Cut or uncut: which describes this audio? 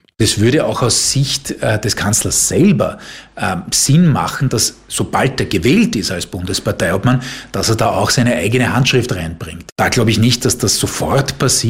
uncut